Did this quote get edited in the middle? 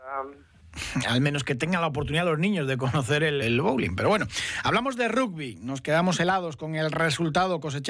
yes; 1 cut; at 3.4 s

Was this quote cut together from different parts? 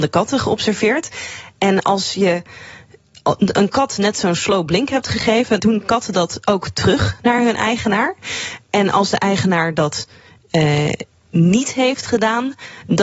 yes; 1 cut; at 5.6 s

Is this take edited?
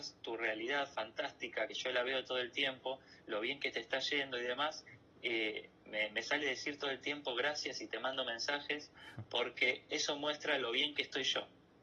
no; 0 cuts

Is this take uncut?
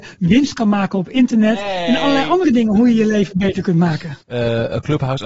no; 1 cut; at 4.2 s

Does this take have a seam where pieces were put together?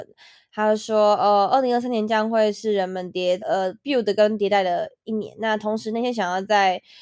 yes; 1 cut; at 3.4 s

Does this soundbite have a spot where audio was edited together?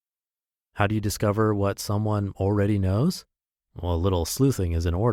no; 0 cuts

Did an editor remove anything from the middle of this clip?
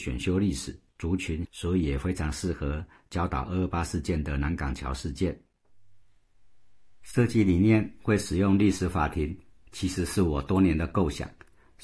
yes; 1 cut; at 1.4 s

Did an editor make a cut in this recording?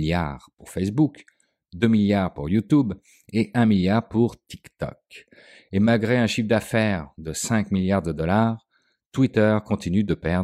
no; 0 cuts

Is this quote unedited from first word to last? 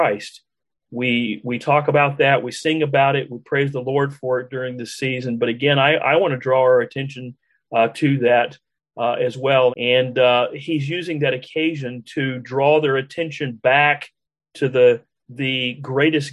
no; 1 cut; at 9.7 s

